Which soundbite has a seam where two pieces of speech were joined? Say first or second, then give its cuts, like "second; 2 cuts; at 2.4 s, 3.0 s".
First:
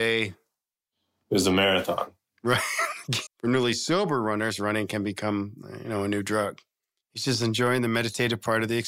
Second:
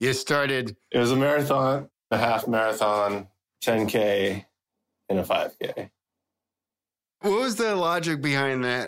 first; 2 cuts; at 3.3 s, 7.0 s